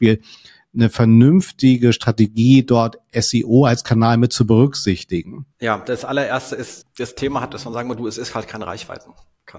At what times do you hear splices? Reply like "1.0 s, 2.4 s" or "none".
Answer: 5.5 s, 6.8 s